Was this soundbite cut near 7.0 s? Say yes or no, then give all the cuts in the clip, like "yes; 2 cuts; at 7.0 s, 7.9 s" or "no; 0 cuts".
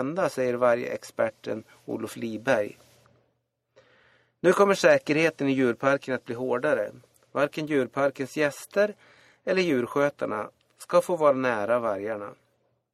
no; 0 cuts